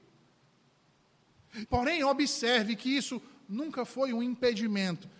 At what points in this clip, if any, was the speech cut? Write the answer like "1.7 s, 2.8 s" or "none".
1.7 s